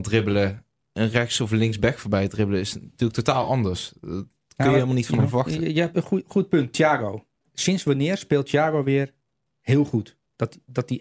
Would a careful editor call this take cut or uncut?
uncut